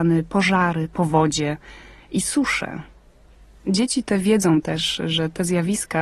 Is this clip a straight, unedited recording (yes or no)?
yes